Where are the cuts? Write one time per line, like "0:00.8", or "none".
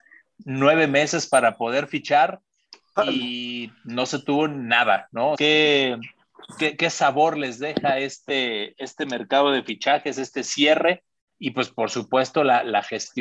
0:05.3